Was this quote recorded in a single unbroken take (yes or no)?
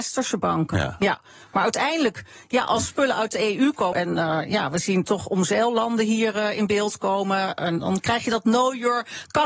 no